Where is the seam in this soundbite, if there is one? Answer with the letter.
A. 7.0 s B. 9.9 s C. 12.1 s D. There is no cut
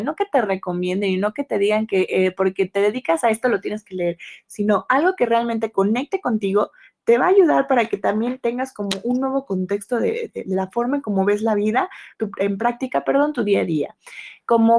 C